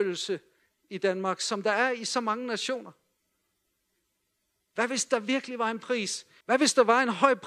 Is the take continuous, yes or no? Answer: no